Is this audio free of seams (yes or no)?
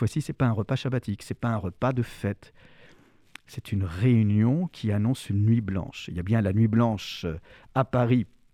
yes